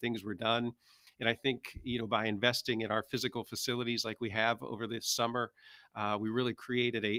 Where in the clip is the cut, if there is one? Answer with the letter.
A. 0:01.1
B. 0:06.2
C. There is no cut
C